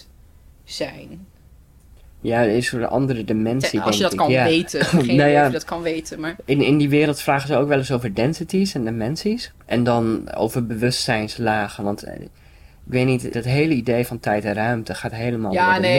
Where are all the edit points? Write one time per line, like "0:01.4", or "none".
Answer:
0:09.6
0:13.3